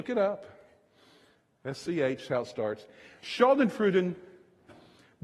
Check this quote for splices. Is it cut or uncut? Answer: uncut